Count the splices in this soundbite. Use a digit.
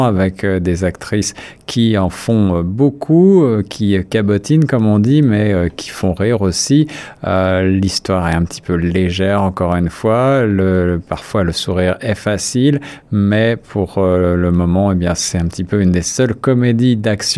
0